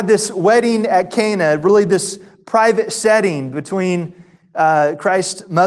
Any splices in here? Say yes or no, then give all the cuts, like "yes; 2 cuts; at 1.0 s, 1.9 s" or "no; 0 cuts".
no; 0 cuts